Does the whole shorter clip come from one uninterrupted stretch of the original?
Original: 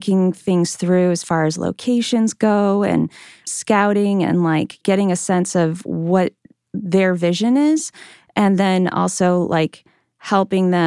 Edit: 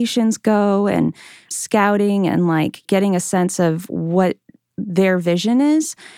yes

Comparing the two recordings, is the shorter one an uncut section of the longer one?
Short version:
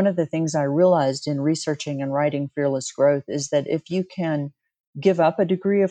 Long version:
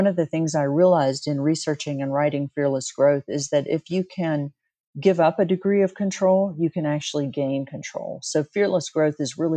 yes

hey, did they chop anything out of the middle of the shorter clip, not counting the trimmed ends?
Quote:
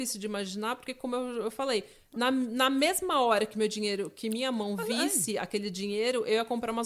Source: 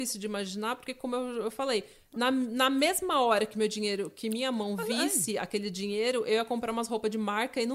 no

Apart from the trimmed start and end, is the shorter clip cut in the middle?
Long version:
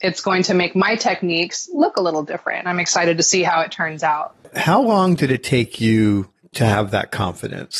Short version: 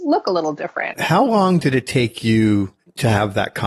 yes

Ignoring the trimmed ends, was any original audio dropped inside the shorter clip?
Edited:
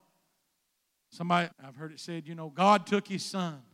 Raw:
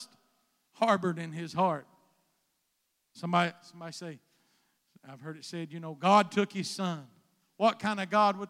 yes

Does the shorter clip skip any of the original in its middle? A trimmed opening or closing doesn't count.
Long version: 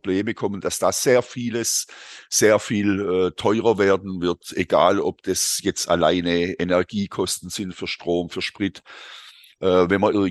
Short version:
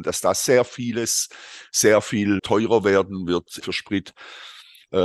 yes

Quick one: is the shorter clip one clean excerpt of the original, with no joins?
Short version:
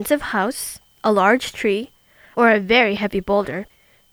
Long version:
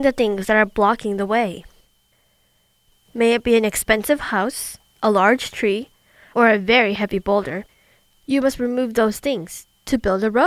yes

